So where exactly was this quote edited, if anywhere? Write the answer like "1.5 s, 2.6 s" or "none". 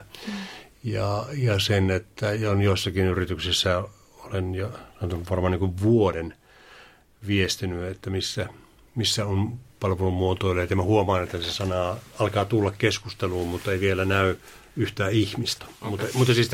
15.6 s